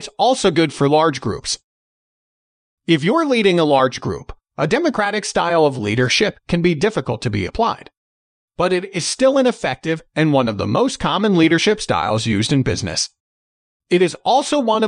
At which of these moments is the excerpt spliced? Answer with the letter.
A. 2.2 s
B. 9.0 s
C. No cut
C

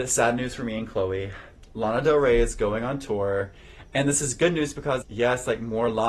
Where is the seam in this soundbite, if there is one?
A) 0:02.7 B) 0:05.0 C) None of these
B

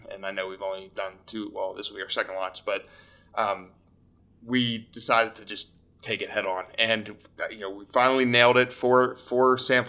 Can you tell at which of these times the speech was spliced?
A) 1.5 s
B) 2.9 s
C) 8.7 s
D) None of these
D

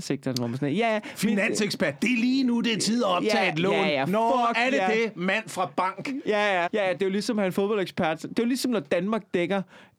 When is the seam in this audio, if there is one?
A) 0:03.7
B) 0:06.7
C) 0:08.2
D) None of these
B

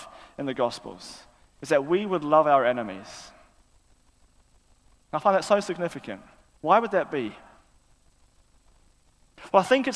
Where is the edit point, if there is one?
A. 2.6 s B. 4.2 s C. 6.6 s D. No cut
D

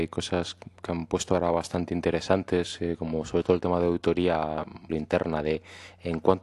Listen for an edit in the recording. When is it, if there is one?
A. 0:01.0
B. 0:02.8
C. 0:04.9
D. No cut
C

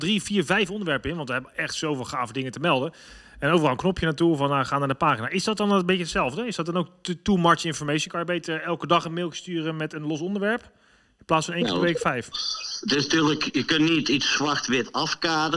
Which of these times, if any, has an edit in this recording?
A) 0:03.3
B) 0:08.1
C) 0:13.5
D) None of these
D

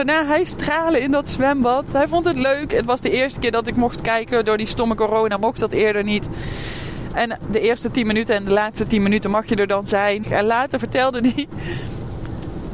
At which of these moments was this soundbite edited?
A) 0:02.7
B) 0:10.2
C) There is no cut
B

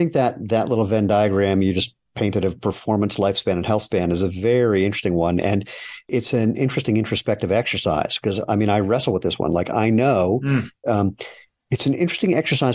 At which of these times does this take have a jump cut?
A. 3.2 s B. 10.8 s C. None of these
B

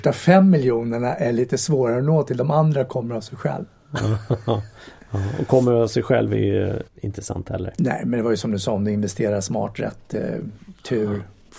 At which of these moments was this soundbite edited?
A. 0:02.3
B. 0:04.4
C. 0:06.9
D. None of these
C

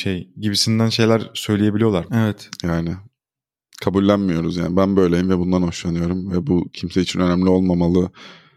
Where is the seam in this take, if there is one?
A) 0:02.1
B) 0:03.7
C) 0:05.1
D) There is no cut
A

